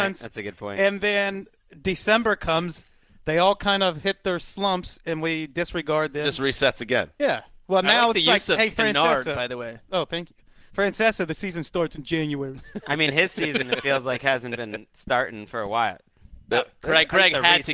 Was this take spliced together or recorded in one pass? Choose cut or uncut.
uncut